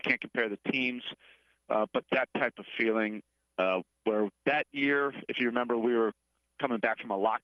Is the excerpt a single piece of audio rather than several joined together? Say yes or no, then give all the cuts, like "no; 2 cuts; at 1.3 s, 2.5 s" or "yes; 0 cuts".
yes; 0 cuts